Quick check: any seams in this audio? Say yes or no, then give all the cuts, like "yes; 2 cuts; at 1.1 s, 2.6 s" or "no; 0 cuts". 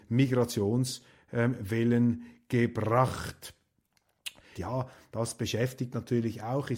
yes; 1 cut; at 4.6 s